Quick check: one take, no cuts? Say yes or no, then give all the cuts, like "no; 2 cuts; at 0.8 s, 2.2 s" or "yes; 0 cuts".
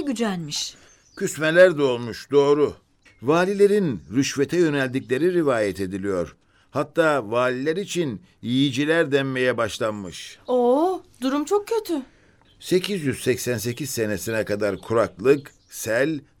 no; 2 cuts; at 3.1 s, 12.4 s